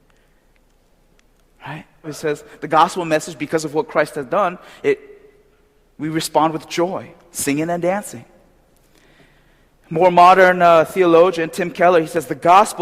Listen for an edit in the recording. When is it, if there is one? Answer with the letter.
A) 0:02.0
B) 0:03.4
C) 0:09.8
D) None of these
A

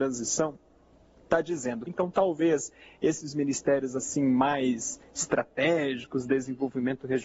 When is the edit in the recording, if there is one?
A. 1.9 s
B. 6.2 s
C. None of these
A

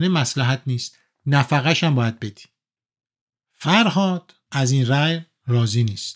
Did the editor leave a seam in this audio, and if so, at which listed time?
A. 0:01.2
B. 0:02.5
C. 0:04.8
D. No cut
D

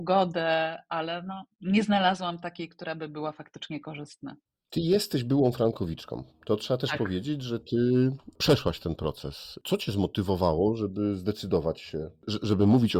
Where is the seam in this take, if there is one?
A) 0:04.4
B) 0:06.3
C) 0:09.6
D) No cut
D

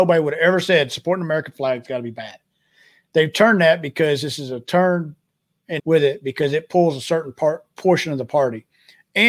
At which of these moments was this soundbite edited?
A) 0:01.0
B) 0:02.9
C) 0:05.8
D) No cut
C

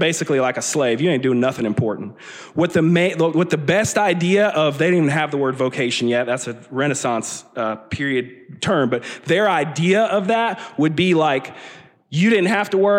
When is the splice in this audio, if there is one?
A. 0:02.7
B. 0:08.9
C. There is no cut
C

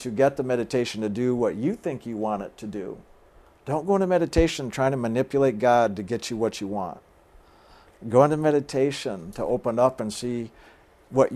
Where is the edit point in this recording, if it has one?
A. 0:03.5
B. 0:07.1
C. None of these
C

